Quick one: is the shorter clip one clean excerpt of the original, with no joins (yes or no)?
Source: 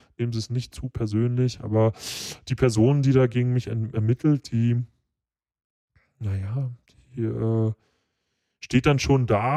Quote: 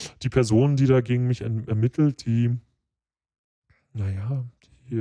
yes